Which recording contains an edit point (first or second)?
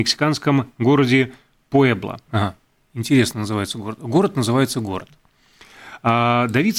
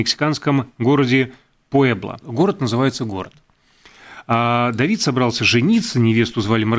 second